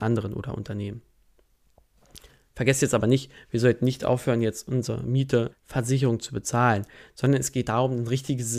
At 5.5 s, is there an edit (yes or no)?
yes